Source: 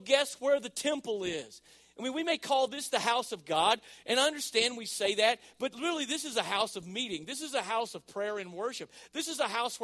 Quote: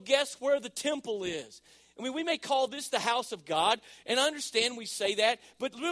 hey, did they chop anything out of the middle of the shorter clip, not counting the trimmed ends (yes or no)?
no